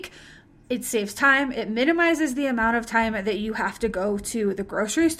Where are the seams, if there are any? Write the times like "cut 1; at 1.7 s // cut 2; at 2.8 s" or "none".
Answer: cut 1; at 1.5 s